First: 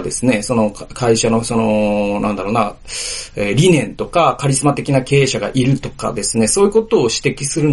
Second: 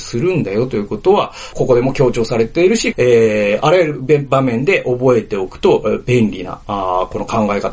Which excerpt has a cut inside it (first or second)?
second